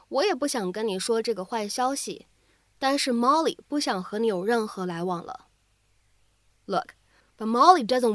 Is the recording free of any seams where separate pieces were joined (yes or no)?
no